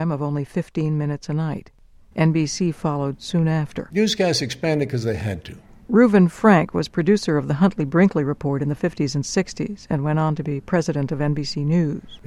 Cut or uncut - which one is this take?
uncut